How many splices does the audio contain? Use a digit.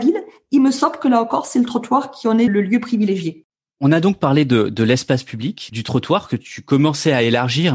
2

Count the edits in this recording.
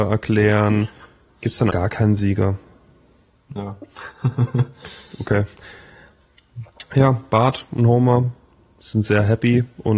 1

